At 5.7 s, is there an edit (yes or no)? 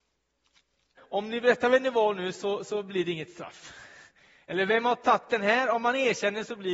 no